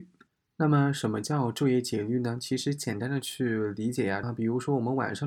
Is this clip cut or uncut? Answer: cut